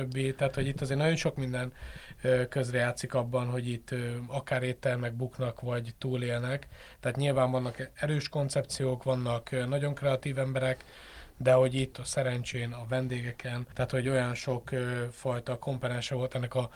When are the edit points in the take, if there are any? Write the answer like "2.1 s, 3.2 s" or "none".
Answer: 11.9 s, 13.7 s